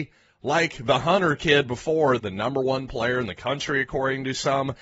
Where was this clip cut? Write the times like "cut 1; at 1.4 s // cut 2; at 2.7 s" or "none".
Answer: cut 1; at 2.2 s